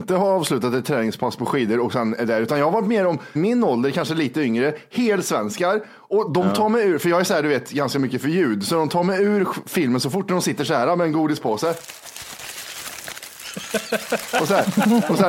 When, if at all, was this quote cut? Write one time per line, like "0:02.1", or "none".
0:03.4